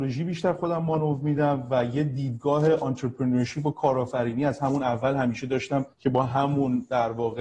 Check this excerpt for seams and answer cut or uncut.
cut